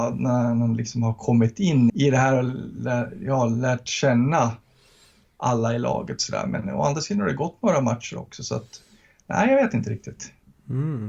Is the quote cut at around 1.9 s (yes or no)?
yes